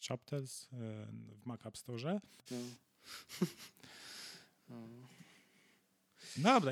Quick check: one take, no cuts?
no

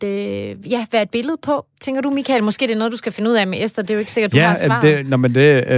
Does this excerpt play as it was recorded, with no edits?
yes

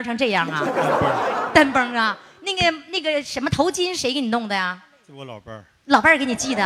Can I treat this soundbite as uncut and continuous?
yes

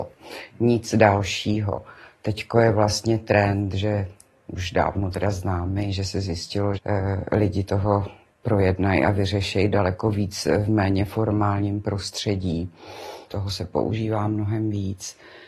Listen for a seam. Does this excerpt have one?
yes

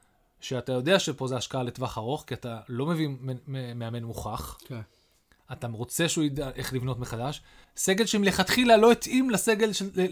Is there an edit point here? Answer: yes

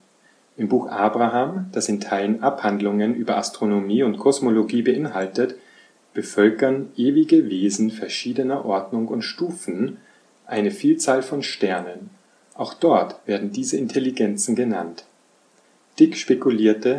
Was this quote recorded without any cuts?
yes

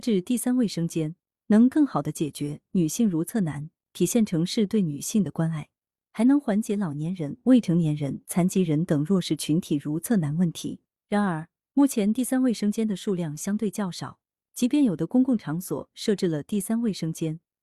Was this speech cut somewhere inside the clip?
no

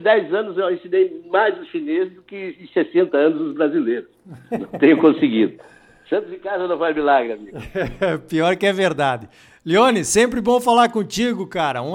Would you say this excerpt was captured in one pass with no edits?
yes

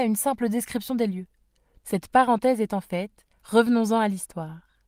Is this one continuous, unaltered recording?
no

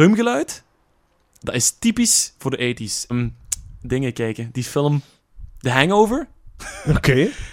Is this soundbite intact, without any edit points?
no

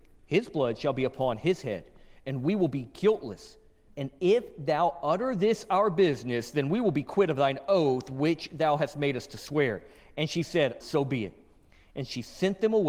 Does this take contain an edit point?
yes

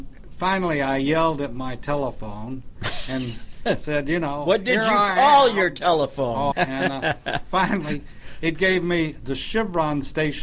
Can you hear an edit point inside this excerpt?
yes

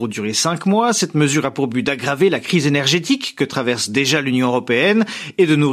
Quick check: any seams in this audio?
no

